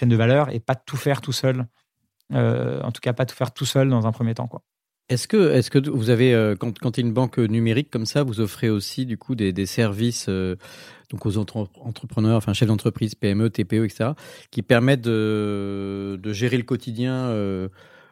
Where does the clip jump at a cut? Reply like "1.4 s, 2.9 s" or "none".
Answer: none